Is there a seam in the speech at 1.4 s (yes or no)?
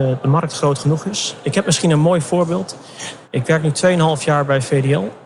no